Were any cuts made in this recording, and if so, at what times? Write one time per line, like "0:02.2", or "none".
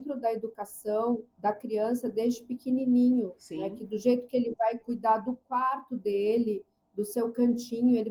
0:01.3